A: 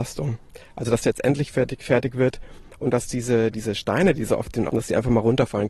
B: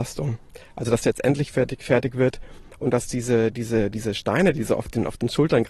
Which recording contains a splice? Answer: A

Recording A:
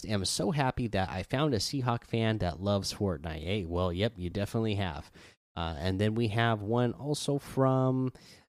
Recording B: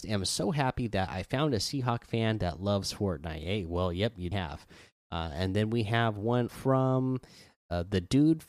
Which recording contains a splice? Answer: B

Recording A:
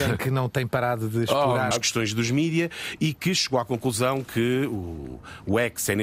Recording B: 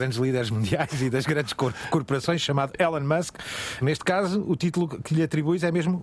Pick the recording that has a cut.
A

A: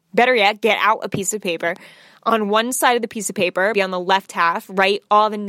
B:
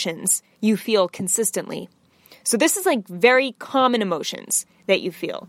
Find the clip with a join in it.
A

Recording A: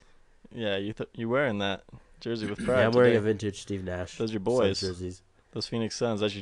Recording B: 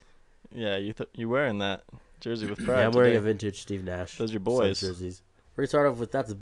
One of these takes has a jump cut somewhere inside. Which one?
B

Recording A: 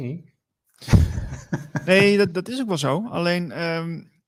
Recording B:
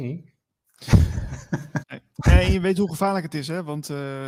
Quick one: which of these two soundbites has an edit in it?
B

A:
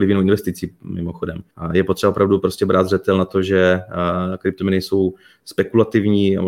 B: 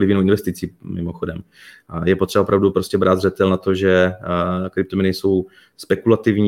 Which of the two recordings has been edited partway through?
A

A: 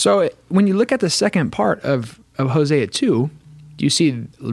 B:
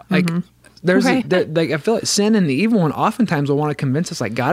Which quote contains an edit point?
B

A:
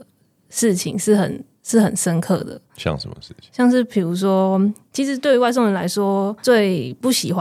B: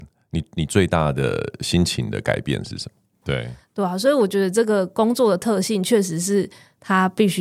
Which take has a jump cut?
B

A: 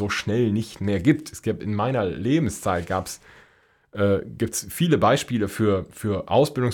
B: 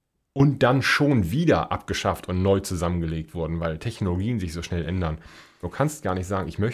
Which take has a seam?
B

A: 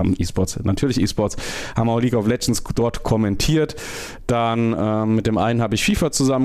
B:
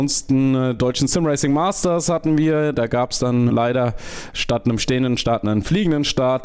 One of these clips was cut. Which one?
B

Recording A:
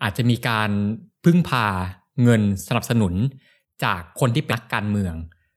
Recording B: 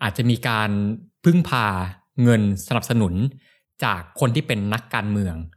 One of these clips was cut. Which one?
A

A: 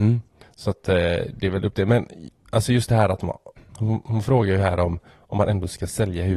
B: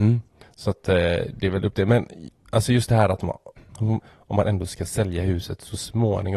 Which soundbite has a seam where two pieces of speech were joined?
B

